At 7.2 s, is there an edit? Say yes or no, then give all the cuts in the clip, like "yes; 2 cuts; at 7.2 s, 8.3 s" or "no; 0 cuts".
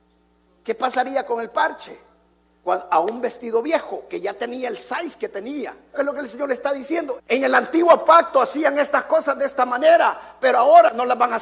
yes; 2 cuts; at 5.9 s, 7.2 s